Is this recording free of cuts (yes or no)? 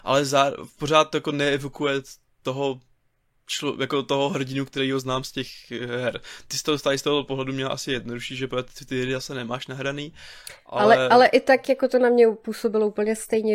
yes